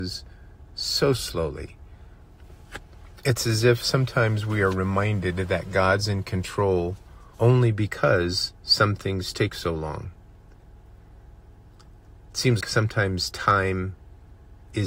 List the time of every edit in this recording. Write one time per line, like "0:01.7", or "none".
0:07.3
0:12.6